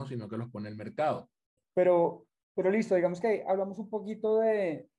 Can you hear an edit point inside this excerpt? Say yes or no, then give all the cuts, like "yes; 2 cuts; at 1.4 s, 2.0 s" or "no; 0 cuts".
yes; 1 cut; at 1.6 s